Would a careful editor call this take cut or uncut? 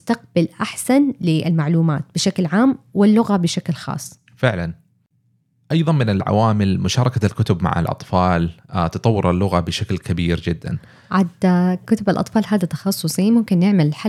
cut